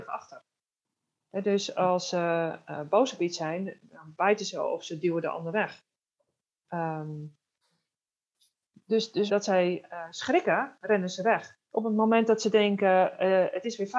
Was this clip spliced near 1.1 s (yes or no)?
no